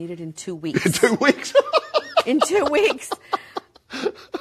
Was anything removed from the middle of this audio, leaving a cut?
no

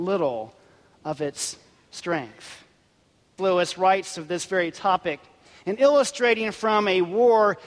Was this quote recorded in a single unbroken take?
no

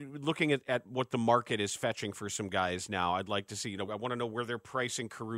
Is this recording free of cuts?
no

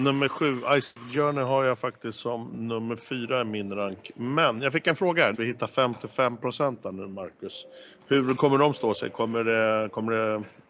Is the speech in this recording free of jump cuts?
no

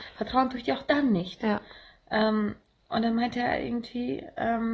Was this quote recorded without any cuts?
yes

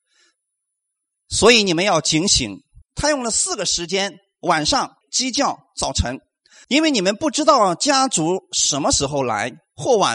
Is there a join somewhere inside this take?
yes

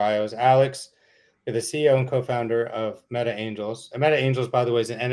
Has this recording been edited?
no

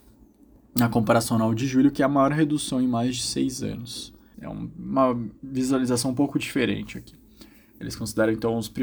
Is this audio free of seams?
no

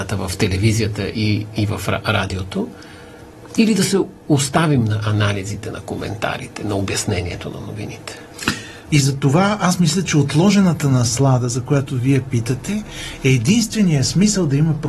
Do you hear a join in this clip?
yes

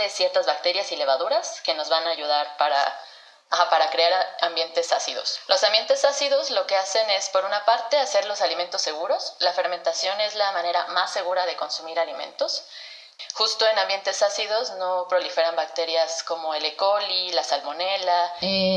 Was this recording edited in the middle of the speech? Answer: no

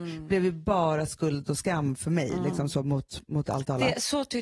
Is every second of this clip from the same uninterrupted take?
yes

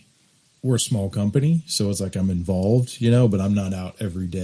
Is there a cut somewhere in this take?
no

